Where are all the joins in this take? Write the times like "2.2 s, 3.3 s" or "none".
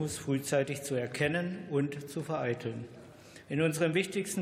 3.4 s